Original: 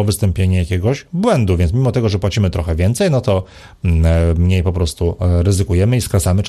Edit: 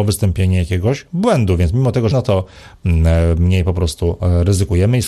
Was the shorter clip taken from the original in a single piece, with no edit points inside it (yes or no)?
no